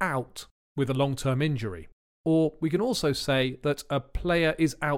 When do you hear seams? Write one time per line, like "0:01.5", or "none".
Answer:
none